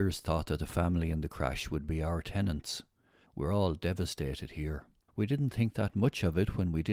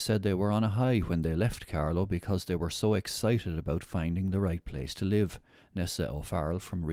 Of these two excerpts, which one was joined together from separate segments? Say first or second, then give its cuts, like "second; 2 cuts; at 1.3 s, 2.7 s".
first; 2 cuts; at 3.3 s, 5.1 s